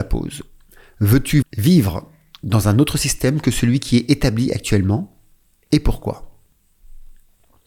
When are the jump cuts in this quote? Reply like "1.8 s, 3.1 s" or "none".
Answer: 1.4 s